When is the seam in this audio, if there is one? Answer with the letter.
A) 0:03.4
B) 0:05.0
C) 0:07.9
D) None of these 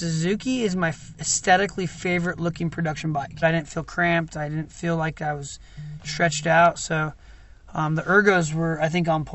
A